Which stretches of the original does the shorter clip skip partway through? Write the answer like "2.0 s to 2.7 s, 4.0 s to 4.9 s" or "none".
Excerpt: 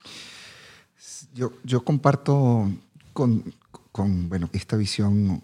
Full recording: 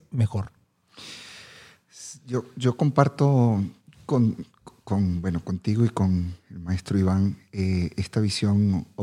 5.4 s to 7.9 s